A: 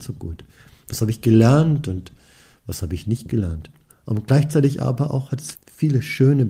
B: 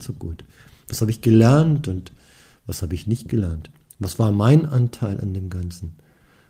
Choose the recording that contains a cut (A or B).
A